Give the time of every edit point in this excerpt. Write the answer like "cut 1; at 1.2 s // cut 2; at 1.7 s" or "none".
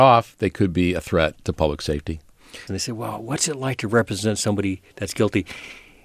cut 1; at 2.7 s

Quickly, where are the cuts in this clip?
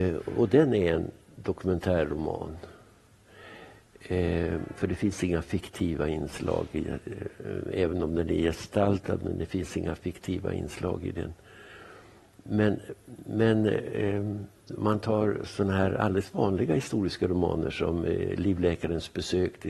none

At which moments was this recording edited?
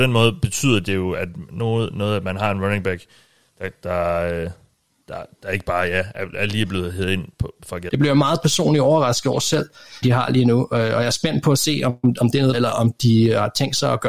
cut 1; at 7.9 s // cut 2; at 10.0 s // cut 3; at 12.5 s

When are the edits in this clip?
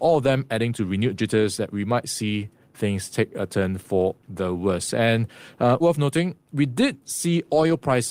cut 1; at 5.8 s

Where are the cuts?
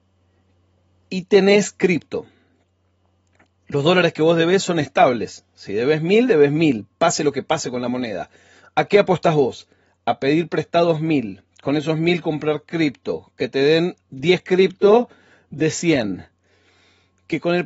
none

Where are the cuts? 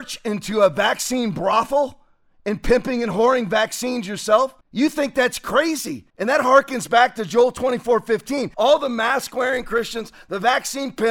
cut 1; at 4.6 s // cut 2; at 6.1 s // cut 3; at 8.5 s

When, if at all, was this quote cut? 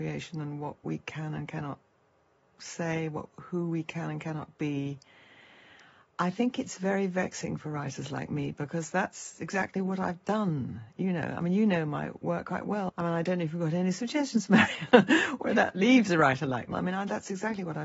cut 1; at 12.9 s // cut 2; at 16.7 s

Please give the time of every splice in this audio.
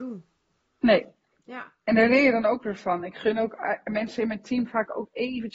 none

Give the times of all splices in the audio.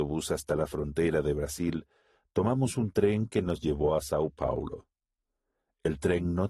none

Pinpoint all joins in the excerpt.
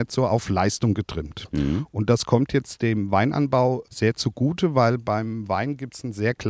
none

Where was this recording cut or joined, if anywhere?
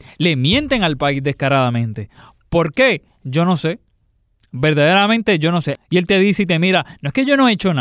cut 1; at 5.8 s

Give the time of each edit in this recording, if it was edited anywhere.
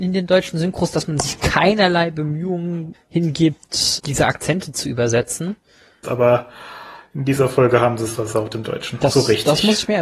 cut 1; at 2.9 s // cut 2; at 4.0 s // cut 3; at 6.0 s

